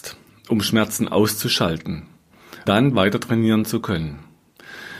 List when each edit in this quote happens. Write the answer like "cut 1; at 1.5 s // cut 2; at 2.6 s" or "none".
cut 1; at 2.7 s